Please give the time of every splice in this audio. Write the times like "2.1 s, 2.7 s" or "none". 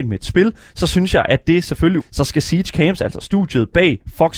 2.0 s